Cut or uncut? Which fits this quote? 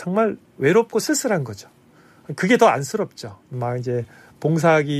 cut